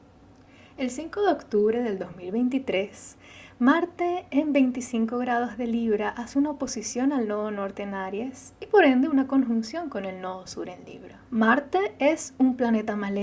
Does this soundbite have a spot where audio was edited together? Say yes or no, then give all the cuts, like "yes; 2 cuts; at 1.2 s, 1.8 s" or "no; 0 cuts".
yes; 1 cut; at 11.2 s